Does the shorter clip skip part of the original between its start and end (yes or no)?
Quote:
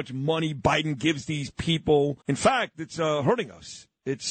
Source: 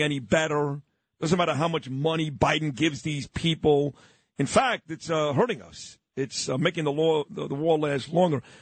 yes